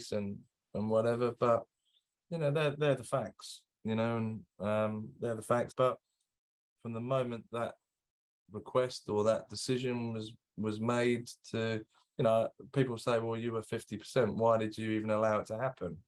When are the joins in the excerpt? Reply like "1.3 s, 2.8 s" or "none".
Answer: 5.7 s